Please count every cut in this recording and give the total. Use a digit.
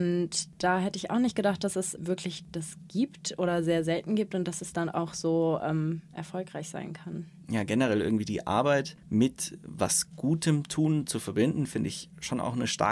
0